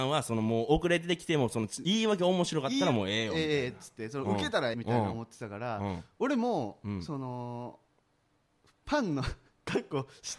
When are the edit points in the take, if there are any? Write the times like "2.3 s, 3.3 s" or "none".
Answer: 4.7 s